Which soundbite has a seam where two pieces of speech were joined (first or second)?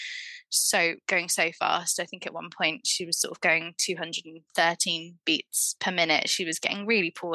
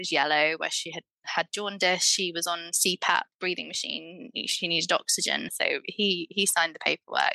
second